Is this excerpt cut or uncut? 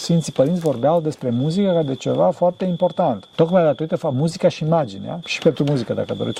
cut